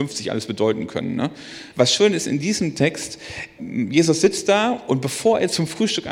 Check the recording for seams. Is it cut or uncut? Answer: cut